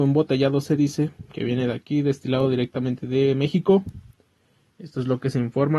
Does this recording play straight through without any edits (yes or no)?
no